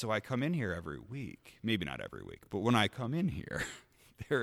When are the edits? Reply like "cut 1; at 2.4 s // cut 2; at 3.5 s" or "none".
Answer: none